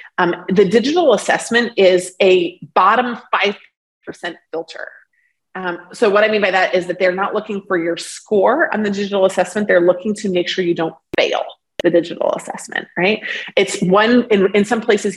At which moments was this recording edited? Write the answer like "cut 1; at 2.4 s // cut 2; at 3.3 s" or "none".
none